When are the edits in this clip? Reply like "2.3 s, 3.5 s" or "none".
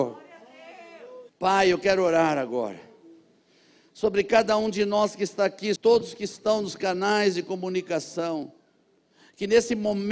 1.3 s, 5.8 s